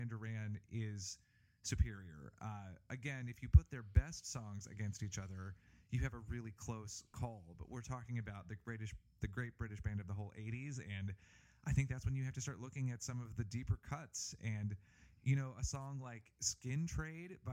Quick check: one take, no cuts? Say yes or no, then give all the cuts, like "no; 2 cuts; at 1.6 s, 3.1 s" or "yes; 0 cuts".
yes; 0 cuts